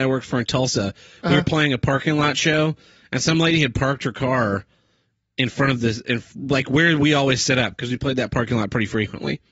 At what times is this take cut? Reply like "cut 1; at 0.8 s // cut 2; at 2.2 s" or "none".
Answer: none